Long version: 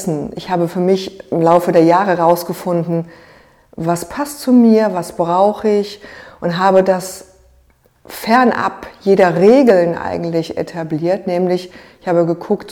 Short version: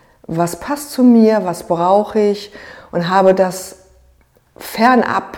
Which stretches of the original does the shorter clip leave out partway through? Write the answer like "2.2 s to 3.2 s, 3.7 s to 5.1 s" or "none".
none